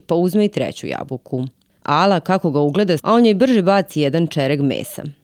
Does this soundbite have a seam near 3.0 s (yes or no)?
yes